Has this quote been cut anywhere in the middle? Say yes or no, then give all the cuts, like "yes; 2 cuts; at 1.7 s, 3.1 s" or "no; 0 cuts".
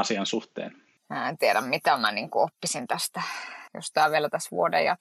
yes; 1 cut; at 3.7 s